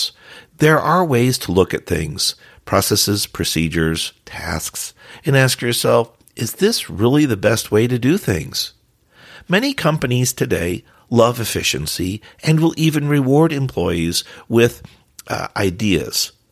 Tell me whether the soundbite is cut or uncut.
uncut